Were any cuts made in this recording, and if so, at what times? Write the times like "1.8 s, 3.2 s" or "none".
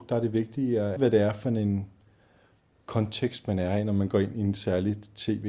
1.0 s